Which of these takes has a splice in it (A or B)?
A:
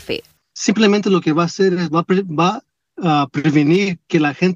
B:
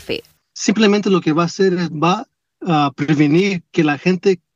B